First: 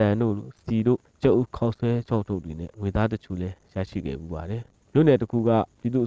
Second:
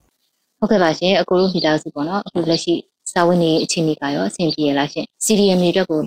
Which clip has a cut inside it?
second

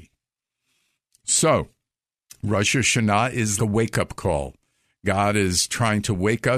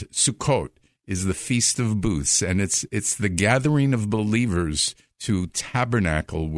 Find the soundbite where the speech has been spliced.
first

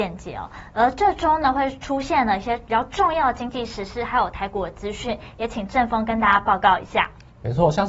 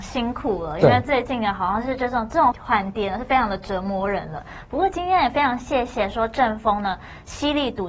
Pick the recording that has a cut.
second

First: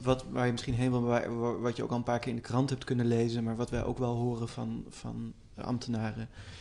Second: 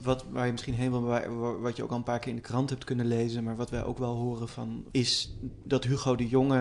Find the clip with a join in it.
second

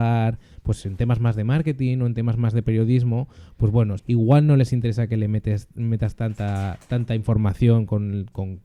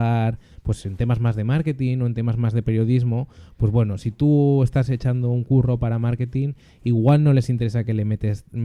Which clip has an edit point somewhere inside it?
first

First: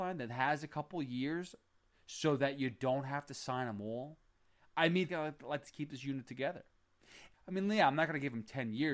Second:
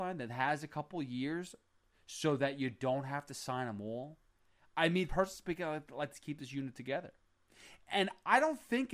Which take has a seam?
first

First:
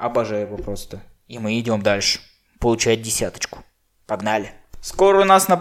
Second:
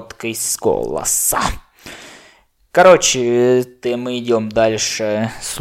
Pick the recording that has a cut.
second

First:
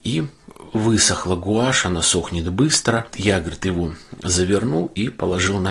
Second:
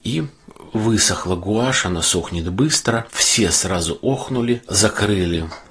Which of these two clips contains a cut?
second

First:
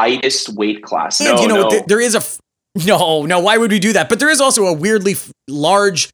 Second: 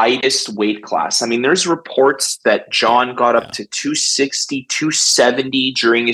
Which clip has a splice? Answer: first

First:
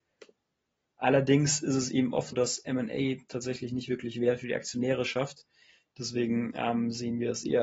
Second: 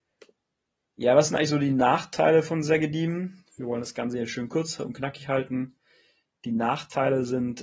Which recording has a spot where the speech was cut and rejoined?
first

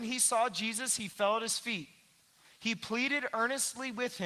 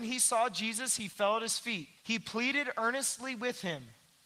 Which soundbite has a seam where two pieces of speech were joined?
second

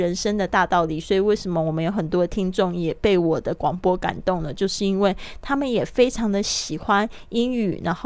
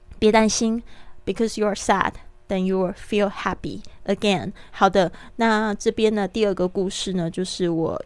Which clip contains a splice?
second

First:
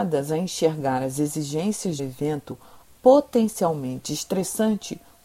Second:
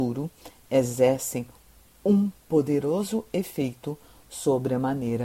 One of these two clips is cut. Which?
first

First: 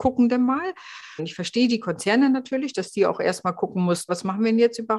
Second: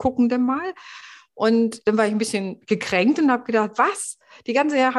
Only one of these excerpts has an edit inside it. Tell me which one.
first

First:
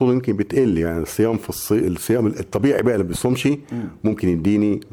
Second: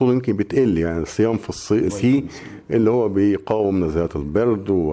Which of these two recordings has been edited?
second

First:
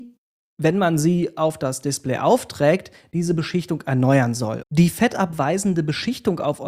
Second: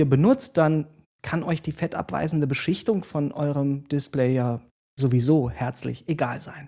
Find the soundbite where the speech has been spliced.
first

